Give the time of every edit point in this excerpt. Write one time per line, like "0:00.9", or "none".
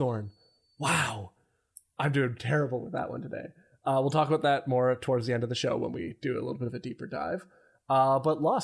none